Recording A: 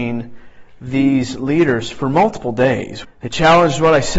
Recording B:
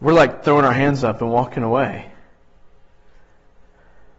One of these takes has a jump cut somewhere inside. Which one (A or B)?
A